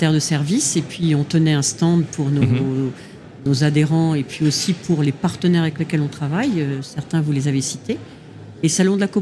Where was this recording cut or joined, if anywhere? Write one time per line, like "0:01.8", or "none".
none